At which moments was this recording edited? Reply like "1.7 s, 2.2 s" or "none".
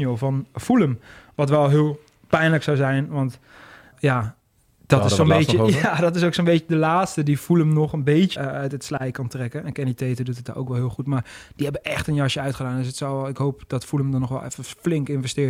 3.9 s, 8.4 s